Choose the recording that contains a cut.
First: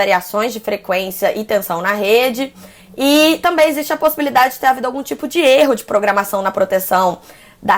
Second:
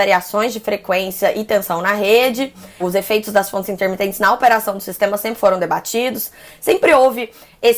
second; 1 cut; at 2.8 s

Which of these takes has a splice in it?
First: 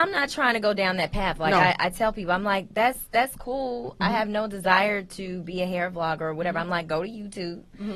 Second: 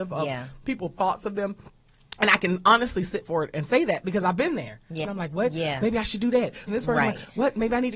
second; 2 cuts; at 5.0 s, 6.7 s

